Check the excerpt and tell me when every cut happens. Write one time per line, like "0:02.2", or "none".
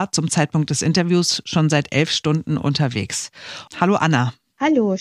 0:03.7